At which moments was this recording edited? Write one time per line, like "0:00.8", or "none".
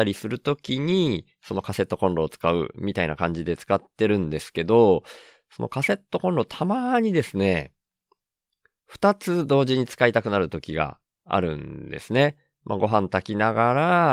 none